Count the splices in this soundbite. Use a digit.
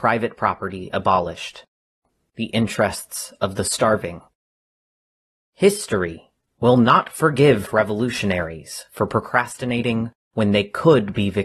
1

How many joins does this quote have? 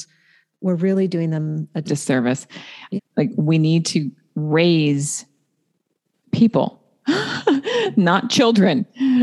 2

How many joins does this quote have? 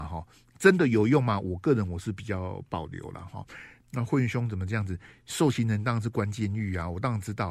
1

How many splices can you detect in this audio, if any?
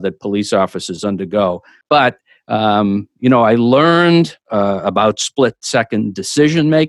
2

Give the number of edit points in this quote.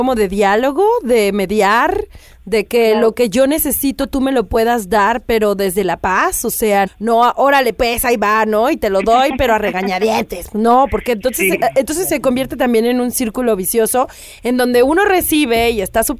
1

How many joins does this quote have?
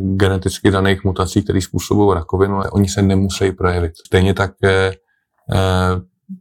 2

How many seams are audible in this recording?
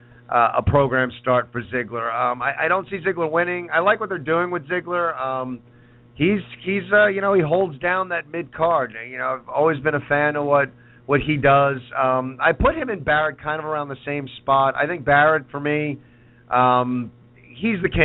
0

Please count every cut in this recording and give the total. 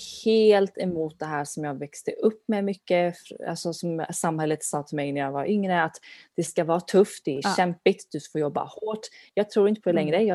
0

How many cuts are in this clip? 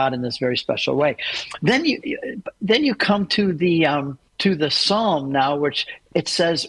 1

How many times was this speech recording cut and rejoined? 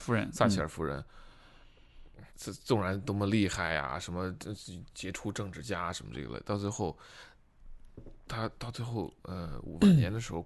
1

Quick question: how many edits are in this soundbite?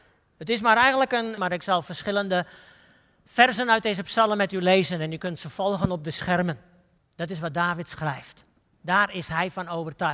2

